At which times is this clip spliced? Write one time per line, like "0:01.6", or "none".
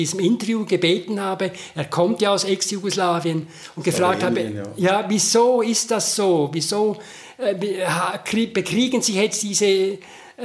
none